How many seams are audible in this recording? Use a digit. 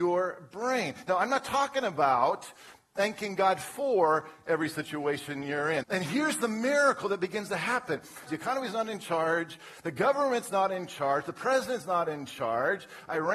2